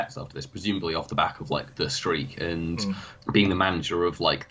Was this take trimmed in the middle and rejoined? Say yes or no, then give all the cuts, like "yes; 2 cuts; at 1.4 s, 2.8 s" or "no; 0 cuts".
no; 0 cuts